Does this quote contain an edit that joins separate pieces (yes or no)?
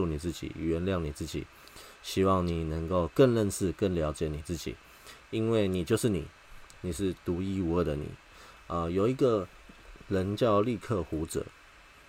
no